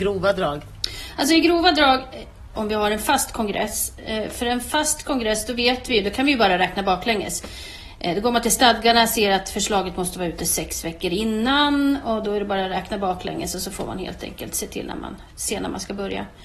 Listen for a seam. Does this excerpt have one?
yes; 1 cut; at 2.5 s

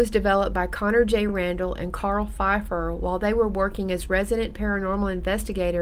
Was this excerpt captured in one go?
yes; 0 cuts

